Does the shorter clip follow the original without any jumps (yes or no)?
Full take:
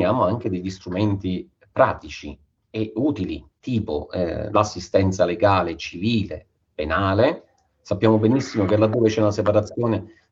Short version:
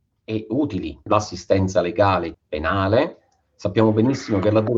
no